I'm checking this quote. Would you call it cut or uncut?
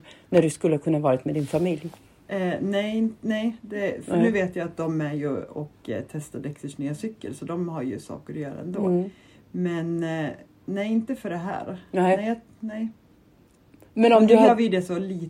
uncut